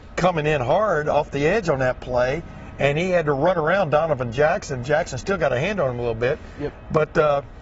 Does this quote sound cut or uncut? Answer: uncut